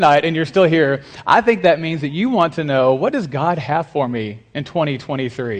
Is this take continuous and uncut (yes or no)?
yes